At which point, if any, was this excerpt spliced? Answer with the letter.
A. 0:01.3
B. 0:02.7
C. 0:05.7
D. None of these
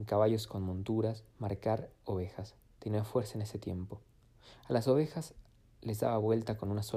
A